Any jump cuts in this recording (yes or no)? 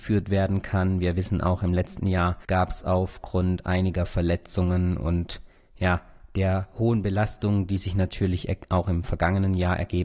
yes